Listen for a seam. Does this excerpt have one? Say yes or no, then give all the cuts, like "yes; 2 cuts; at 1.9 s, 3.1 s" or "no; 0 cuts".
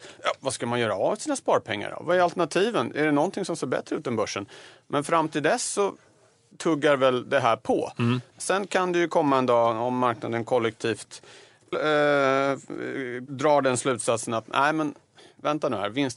yes; 1 cut; at 11.7 s